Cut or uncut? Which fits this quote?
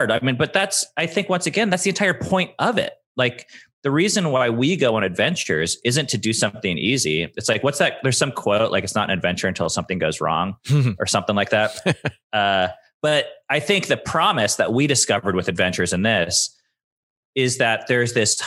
cut